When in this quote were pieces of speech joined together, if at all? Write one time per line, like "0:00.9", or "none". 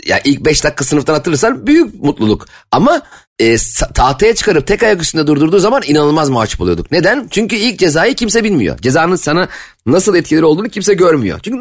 none